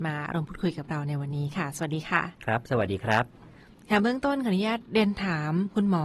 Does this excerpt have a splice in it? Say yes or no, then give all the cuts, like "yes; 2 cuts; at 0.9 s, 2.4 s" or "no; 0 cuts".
yes; 1 cut; at 2.3 s